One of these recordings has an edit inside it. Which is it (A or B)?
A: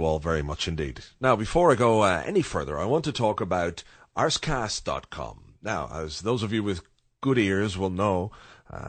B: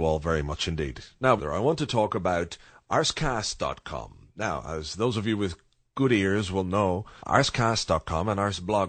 B